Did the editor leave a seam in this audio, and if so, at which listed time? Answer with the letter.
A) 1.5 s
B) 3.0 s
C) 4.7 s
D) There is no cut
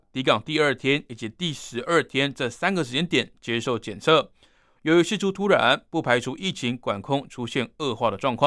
D